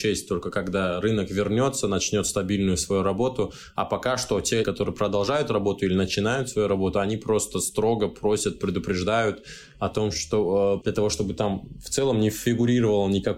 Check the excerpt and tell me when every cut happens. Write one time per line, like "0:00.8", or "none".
0:04.6
0:10.8